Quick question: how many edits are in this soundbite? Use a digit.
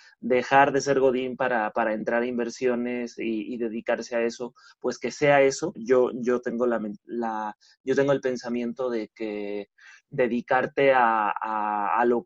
1